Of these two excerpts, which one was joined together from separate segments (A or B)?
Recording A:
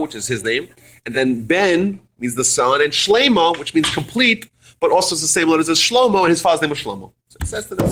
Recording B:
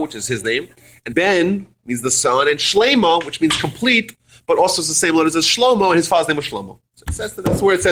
B